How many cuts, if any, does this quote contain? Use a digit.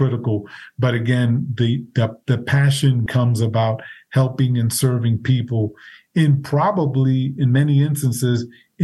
1